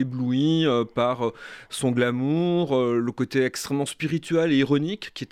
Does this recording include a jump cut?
no; 0 cuts

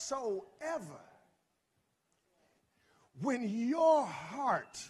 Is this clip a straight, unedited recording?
yes; 0 cuts

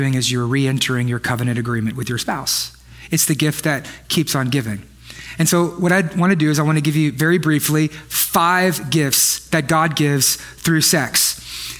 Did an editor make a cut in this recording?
no; 0 cuts

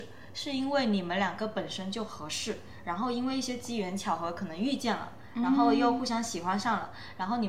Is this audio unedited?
yes; 0 cuts

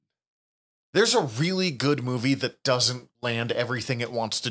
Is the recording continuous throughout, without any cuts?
no; 1 cut; at 3.1 s

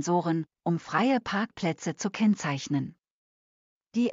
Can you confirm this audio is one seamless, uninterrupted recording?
yes; 0 cuts

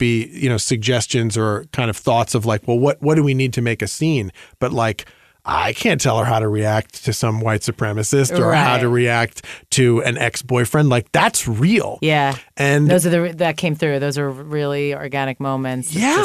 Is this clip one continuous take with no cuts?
yes; 0 cuts

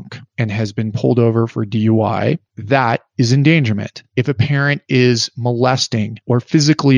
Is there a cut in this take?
no; 0 cuts

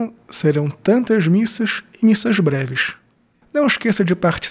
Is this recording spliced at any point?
yes; 1 cut; at 3.4 s

